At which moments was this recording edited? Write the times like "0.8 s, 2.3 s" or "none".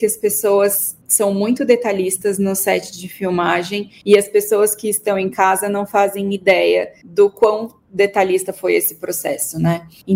none